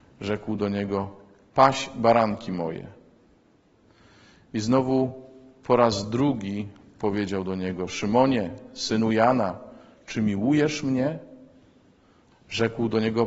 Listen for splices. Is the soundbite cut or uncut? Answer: cut